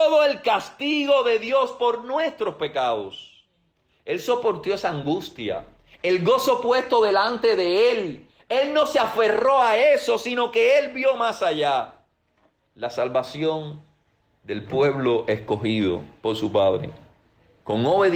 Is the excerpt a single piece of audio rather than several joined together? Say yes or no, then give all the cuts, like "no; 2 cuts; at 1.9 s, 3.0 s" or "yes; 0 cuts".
yes; 0 cuts